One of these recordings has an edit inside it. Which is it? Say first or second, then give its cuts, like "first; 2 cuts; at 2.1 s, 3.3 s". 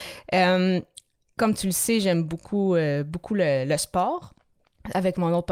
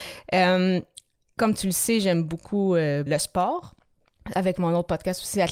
second; 1 cut; at 3.1 s